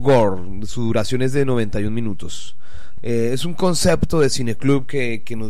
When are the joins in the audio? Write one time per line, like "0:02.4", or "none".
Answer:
0:03.0